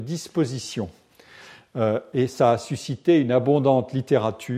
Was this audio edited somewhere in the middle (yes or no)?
no